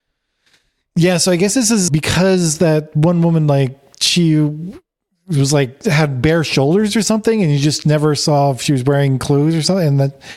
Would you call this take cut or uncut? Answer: cut